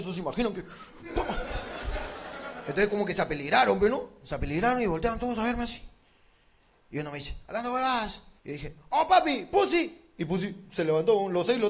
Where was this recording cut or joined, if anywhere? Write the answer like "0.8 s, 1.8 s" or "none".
8.4 s